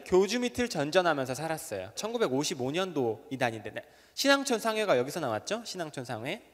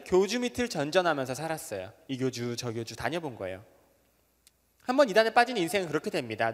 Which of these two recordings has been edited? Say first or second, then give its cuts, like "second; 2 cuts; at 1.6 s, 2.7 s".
first; 1 cut; at 2.0 s